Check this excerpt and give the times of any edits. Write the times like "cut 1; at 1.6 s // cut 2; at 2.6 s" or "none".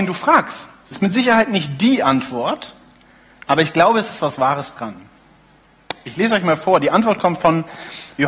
cut 1; at 0.9 s